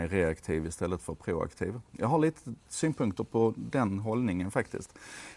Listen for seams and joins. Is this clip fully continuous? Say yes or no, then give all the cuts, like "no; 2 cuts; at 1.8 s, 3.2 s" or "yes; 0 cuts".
yes; 0 cuts